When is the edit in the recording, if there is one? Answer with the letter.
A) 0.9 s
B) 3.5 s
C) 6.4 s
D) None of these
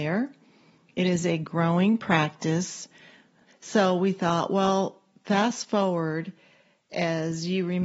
B